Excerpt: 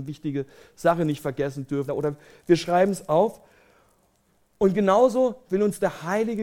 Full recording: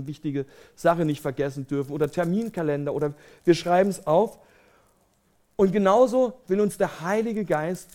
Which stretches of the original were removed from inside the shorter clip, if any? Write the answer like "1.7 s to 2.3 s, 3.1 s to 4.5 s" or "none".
1.9 s to 2.8 s